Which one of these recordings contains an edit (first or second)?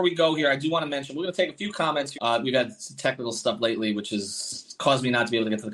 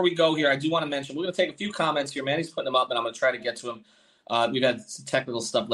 first